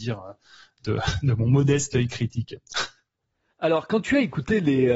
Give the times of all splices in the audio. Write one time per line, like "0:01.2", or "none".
none